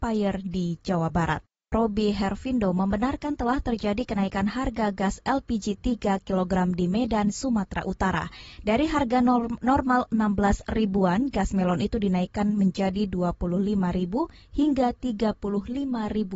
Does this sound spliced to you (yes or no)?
yes